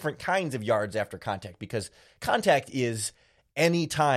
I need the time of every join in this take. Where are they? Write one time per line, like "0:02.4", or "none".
none